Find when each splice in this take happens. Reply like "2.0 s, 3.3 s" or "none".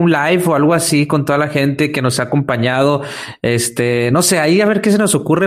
none